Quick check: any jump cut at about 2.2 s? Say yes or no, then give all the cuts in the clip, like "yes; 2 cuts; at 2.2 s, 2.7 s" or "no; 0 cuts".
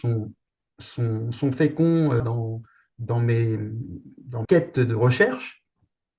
yes; 2 cuts; at 2.2 s, 4.4 s